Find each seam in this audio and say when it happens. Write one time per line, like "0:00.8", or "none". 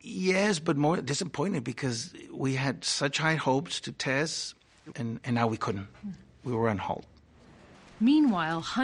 0:04.9